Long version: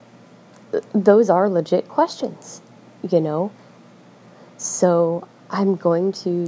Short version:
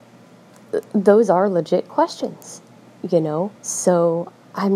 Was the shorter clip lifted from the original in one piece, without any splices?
no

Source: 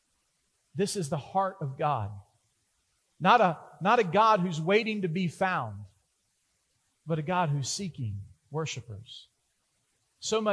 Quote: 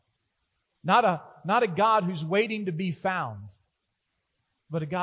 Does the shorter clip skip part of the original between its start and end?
no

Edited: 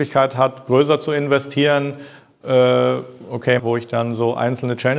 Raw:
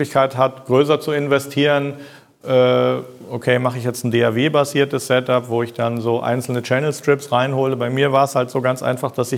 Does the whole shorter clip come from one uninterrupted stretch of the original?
no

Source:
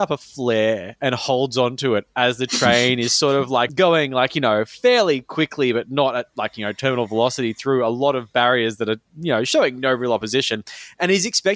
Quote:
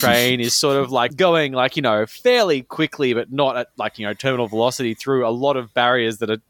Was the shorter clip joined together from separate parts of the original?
no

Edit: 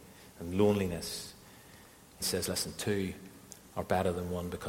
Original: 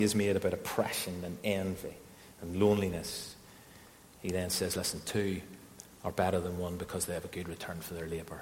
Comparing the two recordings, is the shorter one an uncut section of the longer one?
no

